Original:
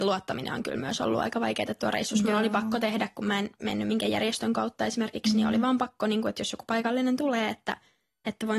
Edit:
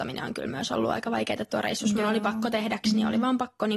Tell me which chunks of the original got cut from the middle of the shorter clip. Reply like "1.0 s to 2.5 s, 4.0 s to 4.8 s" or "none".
3.1 s to 5.2 s